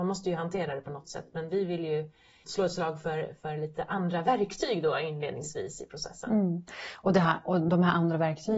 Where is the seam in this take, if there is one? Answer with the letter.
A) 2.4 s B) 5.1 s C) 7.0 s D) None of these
A